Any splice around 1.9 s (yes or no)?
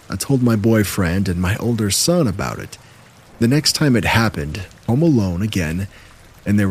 no